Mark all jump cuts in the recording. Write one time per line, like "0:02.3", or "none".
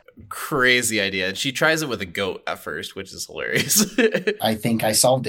0:04.4